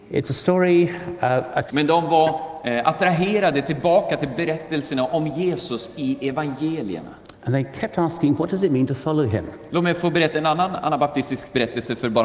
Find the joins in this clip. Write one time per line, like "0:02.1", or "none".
0:01.7
0:09.7